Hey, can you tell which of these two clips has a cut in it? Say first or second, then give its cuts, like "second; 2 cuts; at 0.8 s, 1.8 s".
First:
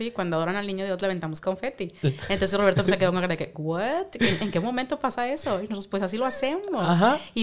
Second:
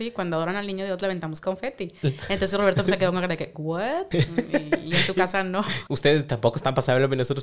second; 1 cut; at 4.1 s